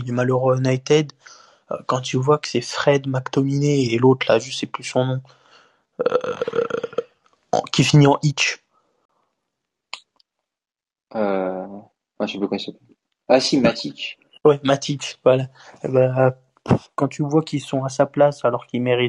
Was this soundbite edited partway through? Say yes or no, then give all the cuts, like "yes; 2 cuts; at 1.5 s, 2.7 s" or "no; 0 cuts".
no; 0 cuts